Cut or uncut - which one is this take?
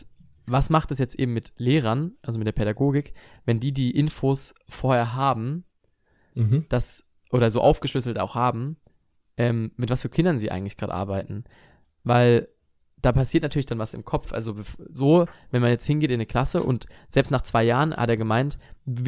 uncut